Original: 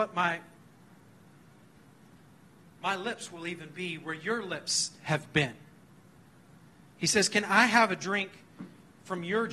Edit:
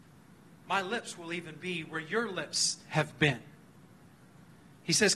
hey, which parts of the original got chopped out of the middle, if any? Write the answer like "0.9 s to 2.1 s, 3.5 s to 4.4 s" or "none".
none